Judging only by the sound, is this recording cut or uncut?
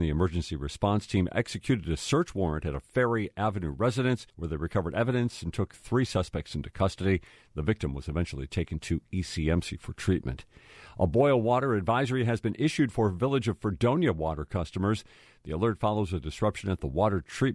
cut